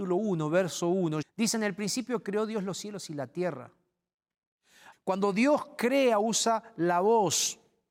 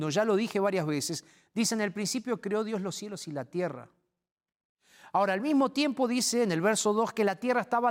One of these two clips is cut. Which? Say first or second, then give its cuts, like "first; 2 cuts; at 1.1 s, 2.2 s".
first; 2 cuts; at 1.2 s, 4.9 s